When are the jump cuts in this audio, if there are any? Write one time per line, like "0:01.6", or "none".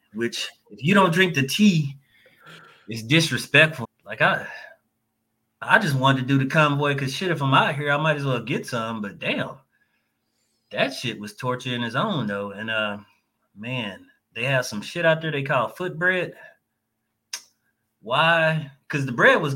0:03.8